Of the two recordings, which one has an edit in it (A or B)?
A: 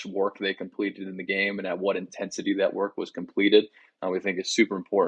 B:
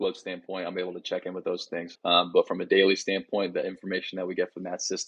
B